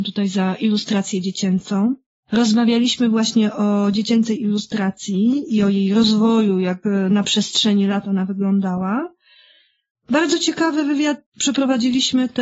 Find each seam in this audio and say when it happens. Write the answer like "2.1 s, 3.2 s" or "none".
none